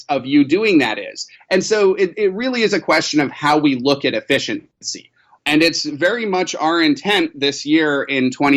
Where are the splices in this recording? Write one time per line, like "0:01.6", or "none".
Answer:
0:01.4
0:05.4

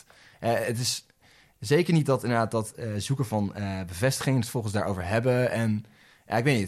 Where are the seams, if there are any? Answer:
none

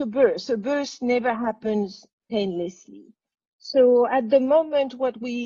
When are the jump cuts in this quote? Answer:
none

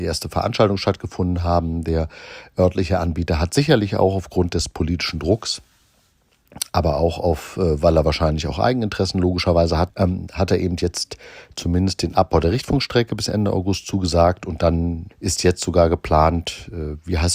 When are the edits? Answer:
0:09.9
0:15.1

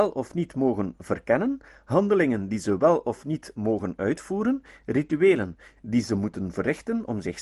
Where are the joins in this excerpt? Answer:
0:05.8

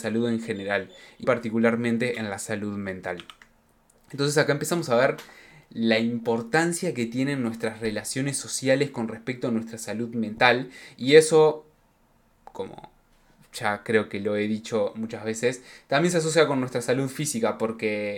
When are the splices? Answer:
0:01.2

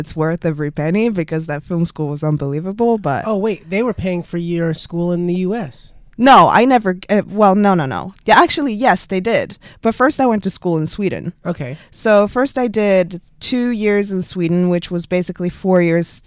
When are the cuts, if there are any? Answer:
none

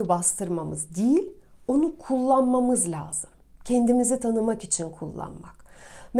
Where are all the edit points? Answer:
none

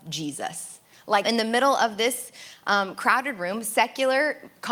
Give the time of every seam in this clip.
0:01.2

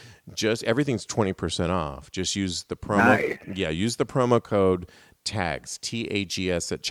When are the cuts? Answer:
none

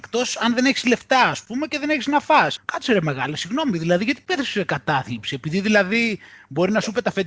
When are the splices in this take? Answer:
0:02.6

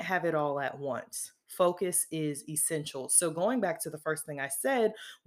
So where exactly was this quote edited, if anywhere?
none

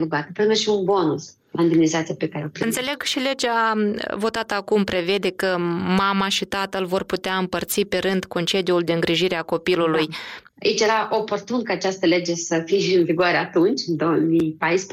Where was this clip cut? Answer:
0:10.5

